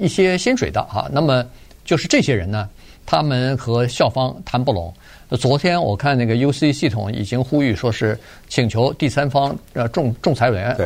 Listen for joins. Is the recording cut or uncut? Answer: uncut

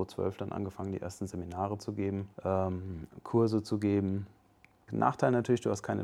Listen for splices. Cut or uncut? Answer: cut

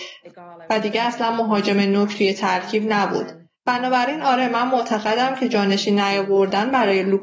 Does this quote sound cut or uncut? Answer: cut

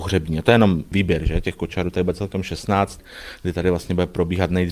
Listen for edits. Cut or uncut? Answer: uncut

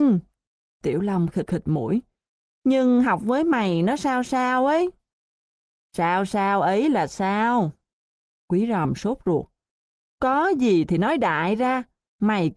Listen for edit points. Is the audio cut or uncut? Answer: uncut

